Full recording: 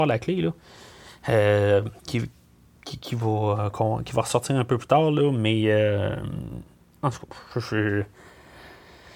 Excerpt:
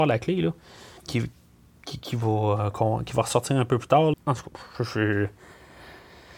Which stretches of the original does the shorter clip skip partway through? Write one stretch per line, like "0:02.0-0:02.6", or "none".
0:01.0-0:02.0
0:05.1-0:06.9